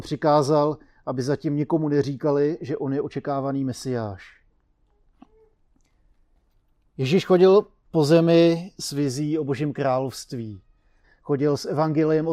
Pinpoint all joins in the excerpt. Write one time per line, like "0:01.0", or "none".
0:11.0